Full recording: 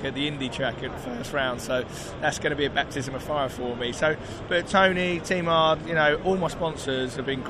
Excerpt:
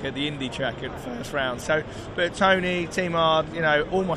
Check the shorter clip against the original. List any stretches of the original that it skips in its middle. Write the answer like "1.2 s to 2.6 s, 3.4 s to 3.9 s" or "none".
1.6 s to 3.9 s